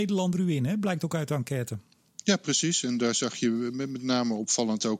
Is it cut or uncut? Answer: uncut